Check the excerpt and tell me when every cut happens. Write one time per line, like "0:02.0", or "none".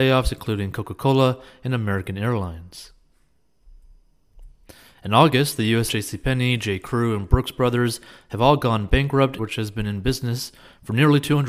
0:05.9
0:09.4